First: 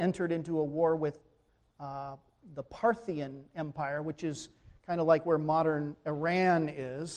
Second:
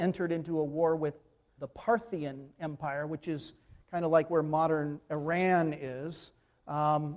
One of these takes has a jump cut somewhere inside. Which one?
second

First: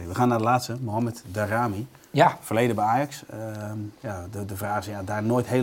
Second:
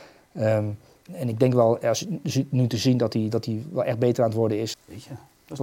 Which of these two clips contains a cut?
second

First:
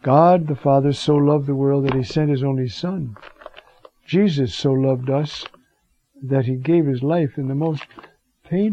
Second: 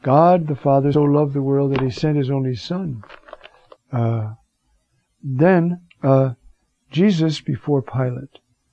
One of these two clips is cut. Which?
second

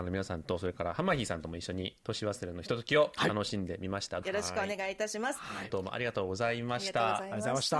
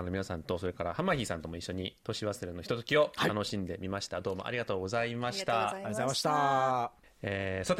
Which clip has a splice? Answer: first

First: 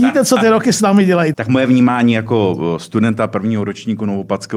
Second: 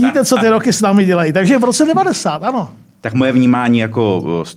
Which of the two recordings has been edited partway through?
first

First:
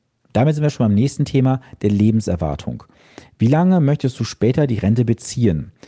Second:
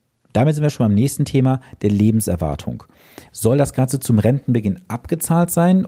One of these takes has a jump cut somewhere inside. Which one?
second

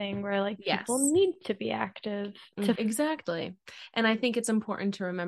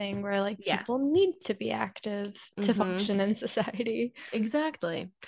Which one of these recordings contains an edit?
first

